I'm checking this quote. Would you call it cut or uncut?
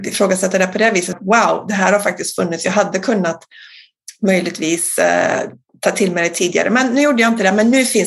cut